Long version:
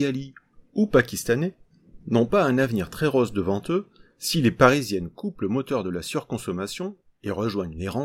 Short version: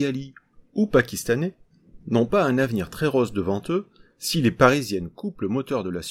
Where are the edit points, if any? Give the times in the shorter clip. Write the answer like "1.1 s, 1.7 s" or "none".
none